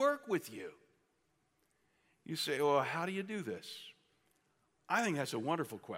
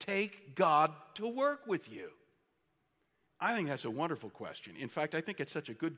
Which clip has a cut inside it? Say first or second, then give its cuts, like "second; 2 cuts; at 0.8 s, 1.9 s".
second; 1 cut; at 3.3 s